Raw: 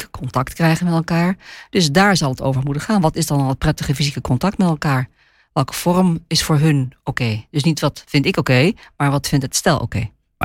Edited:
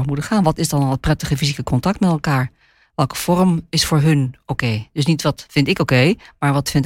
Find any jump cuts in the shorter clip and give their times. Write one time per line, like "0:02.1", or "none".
none